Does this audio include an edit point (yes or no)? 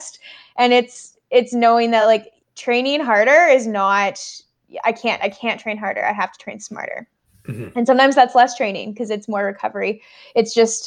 no